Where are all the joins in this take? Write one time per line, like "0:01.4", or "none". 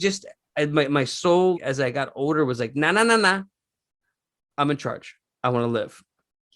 0:01.5